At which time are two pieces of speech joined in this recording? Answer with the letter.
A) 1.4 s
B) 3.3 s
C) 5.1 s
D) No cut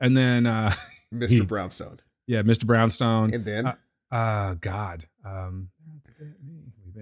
D